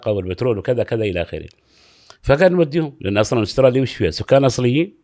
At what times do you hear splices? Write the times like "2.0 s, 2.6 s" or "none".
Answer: none

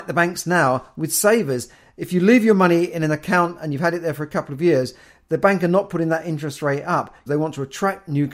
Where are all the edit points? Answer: 7.3 s

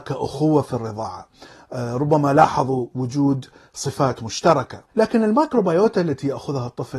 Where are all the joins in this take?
4.9 s

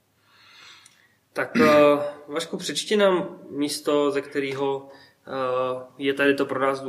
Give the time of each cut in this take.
none

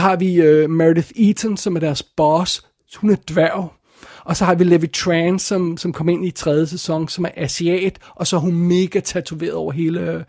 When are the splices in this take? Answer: none

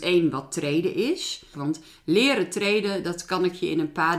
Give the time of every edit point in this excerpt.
1.5 s

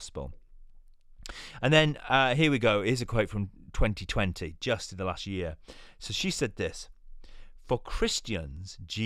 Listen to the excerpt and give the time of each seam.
none

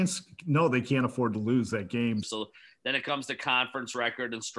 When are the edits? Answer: 2.2 s

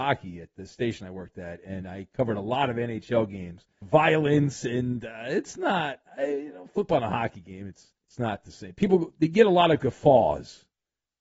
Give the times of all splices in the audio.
3.8 s, 8.0 s

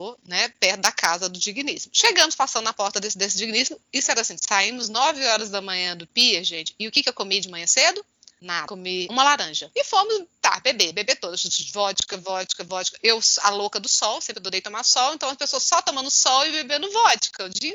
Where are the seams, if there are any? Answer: none

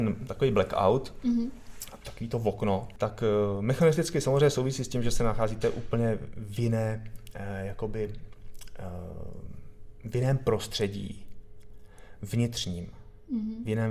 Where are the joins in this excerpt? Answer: none

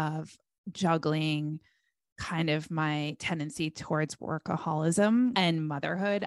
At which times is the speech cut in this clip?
5.3 s

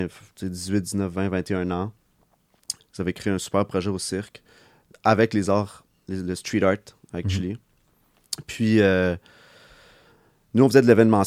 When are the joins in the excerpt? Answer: 2.8 s

